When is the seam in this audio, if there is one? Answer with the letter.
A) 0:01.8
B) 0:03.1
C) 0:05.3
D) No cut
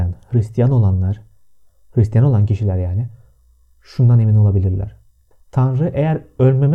C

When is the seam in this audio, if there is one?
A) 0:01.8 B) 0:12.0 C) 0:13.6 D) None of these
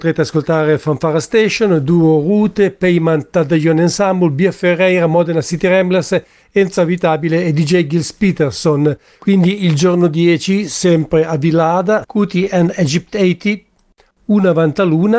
B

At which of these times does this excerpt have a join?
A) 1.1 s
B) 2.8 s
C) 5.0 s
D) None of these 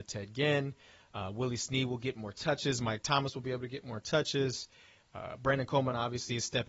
D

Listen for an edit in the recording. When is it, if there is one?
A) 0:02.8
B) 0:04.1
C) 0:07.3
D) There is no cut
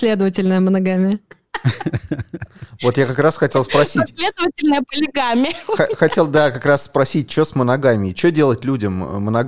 D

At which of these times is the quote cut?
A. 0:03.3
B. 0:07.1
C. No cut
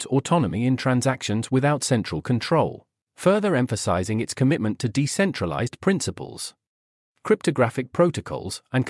B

